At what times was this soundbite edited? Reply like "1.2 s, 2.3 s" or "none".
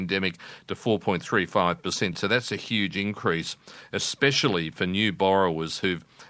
none